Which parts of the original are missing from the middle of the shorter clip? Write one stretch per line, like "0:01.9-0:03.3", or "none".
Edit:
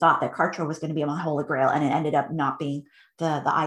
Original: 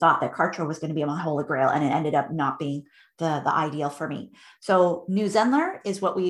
none